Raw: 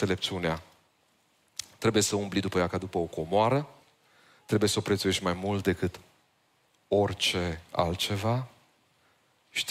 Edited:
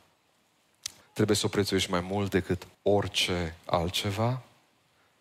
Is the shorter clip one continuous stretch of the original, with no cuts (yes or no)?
no